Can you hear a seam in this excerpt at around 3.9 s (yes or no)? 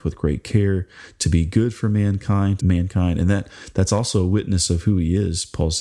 no